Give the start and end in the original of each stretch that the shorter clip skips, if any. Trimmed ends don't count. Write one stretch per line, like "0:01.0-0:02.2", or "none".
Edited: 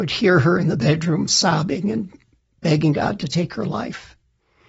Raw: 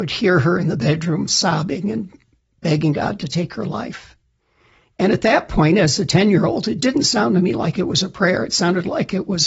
none